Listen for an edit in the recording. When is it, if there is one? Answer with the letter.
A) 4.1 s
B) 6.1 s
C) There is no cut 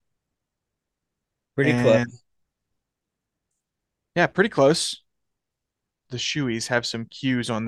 B